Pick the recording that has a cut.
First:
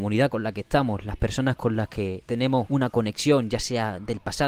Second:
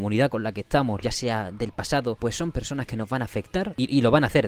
second; 2 cuts; at 1.0 s, 2.2 s

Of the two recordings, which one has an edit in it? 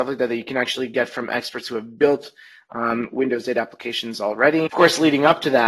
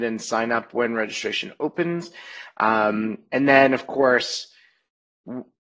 first; 1 cut; at 4.7 s

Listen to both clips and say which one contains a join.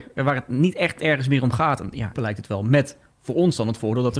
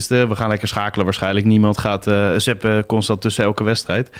first; 1 cut; at 2.1 s

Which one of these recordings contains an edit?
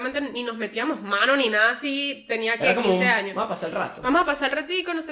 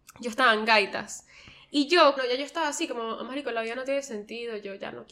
second; 1 cut; at 2.2 s

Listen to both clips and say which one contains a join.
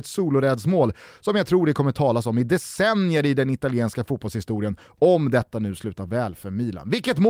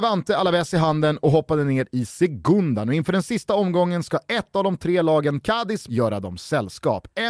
second; 1 cut; at 5.9 s

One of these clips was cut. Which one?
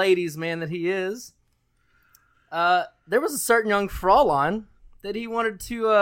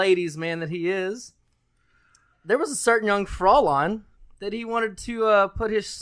second; 1 cut; at 2.3 s

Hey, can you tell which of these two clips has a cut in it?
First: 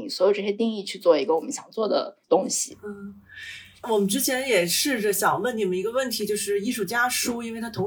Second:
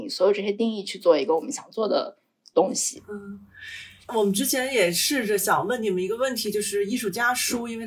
first; 1 cut; at 2.2 s

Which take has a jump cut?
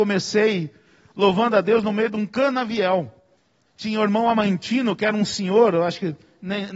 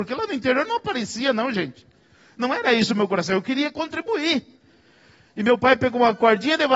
first; 1 cut; at 3.6 s

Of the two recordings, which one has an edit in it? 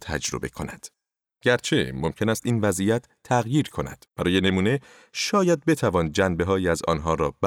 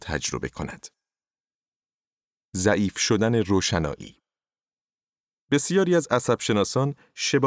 first; 2 cuts; at 1.3 s, 4.1 s

